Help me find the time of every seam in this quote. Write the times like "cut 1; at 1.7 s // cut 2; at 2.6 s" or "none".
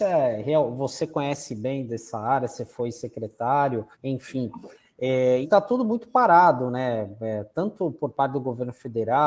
cut 1; at 3.9 s // cut 2; at 5.4 s